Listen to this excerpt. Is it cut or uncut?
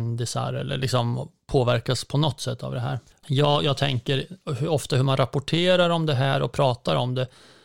cut